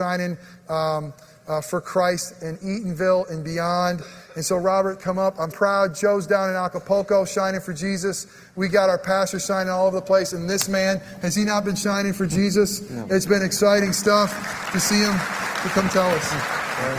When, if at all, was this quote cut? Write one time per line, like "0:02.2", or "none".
0:05.5